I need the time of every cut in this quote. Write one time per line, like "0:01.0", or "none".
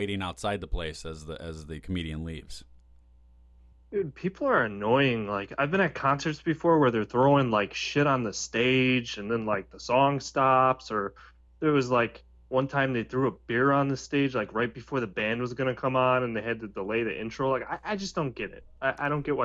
none